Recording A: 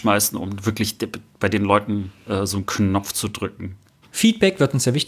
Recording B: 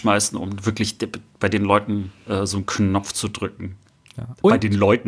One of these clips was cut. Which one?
A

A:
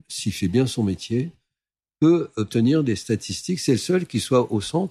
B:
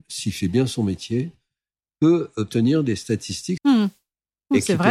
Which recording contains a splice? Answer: B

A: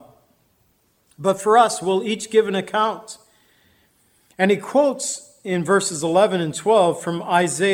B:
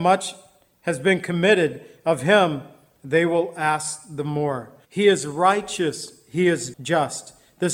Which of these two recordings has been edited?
B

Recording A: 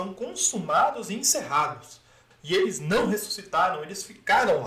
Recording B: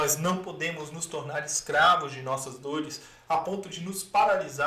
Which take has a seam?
A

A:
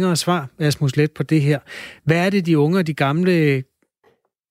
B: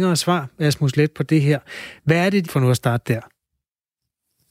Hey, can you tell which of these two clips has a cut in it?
B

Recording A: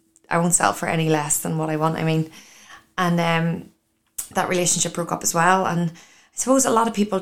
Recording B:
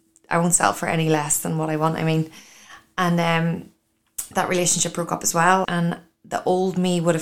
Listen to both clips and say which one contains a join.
B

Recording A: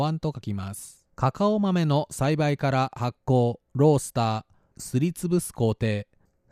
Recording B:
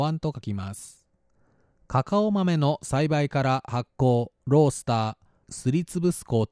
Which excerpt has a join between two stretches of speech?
A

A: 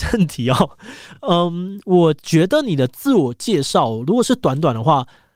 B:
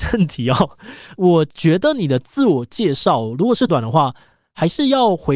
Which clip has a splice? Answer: B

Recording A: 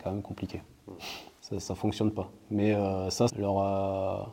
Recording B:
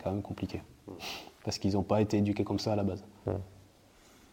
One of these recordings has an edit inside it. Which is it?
A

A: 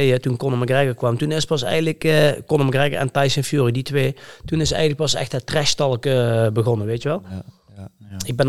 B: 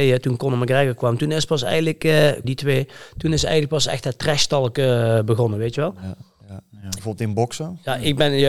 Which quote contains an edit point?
B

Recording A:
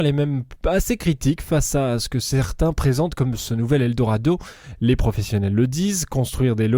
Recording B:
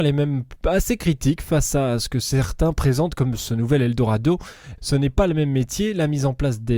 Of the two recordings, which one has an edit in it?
B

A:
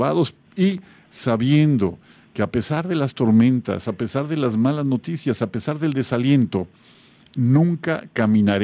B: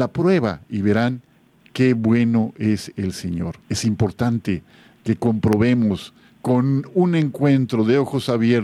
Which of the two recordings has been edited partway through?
B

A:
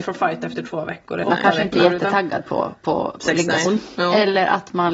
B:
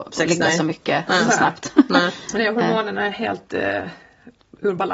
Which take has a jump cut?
A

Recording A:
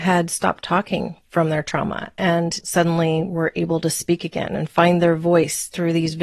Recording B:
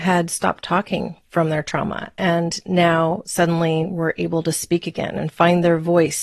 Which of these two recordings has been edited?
A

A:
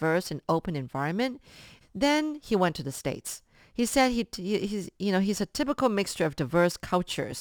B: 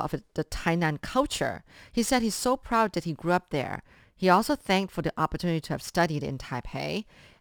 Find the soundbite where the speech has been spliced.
A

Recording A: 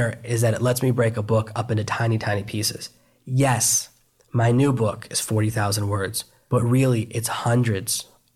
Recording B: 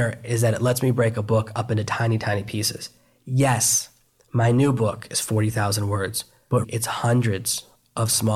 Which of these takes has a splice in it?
B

